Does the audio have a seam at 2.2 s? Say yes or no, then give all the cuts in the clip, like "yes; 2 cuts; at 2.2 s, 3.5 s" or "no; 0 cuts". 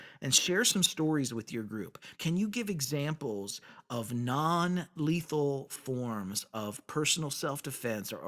yes; 1 cut; at 2.2 s